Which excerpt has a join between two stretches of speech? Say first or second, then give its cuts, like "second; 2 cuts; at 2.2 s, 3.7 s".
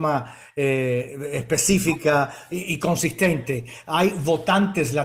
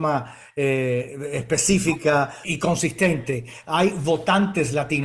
second; 1 cut; at 2.4 s